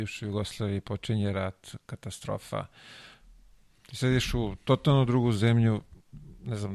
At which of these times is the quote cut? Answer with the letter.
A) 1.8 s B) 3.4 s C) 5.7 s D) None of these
D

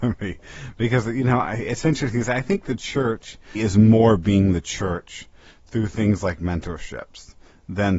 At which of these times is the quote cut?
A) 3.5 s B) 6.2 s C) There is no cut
A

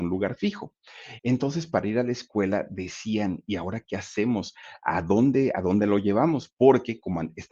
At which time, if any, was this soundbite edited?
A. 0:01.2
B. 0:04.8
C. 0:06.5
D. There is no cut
A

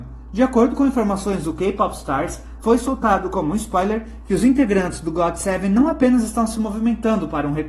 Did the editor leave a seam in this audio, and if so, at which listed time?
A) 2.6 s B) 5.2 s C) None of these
A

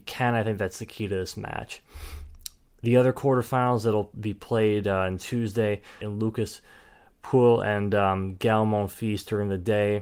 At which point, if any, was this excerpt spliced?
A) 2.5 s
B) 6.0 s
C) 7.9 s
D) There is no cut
B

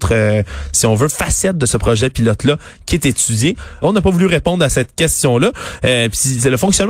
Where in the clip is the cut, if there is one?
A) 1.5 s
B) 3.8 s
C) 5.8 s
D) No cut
B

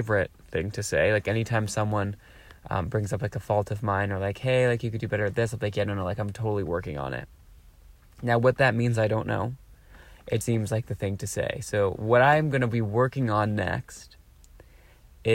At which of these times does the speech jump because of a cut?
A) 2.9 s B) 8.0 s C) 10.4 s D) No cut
C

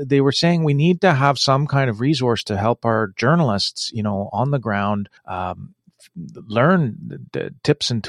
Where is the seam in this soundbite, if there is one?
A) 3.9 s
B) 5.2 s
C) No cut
B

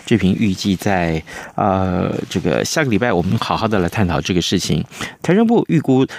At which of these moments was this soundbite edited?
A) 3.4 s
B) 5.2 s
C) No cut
B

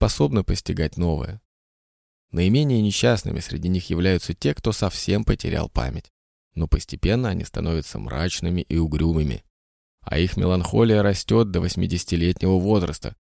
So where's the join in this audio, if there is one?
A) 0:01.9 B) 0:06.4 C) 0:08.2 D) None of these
B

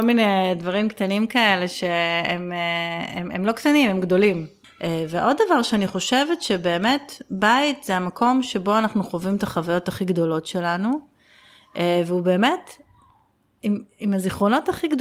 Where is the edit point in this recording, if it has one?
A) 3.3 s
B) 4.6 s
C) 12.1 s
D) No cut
B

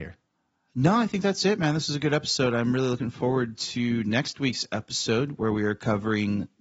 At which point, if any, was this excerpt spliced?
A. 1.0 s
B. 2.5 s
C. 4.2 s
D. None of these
D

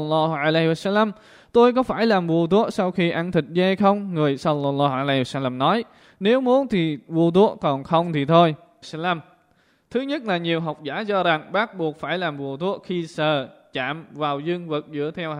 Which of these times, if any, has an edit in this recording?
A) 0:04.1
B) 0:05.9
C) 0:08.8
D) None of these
C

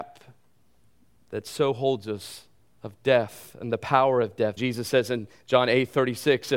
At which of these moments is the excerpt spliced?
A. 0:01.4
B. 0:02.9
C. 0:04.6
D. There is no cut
C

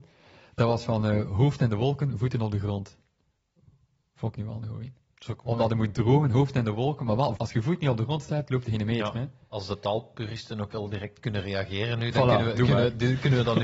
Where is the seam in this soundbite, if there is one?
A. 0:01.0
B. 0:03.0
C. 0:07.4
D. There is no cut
C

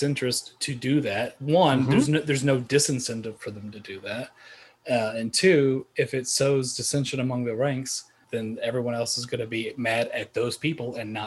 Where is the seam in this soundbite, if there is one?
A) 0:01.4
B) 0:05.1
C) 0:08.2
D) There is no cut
C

